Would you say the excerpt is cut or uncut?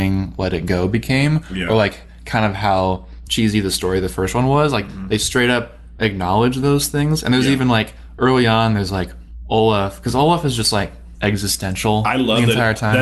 uncut